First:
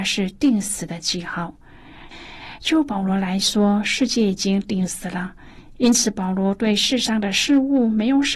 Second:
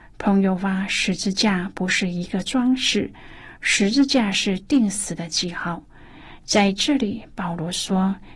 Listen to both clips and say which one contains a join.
first; 1 cut; at 2.1 s

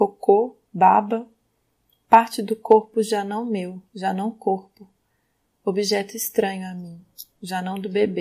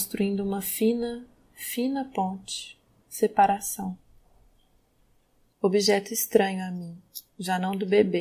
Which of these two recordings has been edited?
second; 1 cut; at 5.5 s

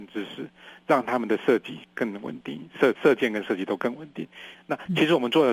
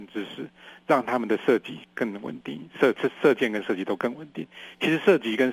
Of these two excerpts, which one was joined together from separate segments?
first; 2 cuts; at 2.9 s, 4.5 s

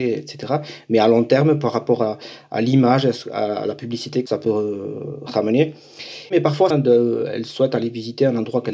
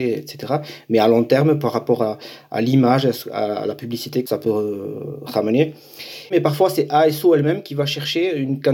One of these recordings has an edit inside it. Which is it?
first; 1 cut; at 6.7 s

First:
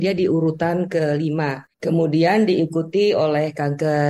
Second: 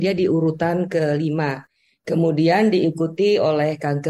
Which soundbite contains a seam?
first; 1 cut; at 1.7 s

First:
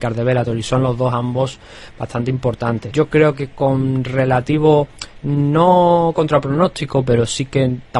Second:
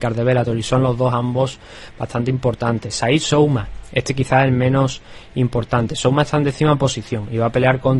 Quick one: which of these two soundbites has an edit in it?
first; 1 cut; at 2.9 s

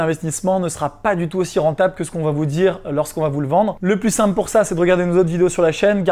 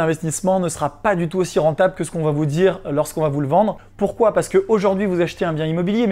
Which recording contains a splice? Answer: second; 1 cut; at 3.8 s

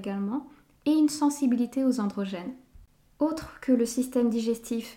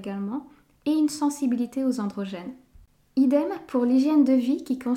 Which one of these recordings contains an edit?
first; 1 cut; at 3.1 s

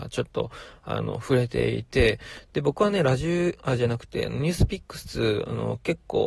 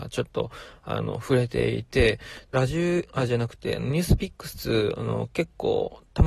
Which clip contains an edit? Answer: second; 1 cut; at 2.5 s

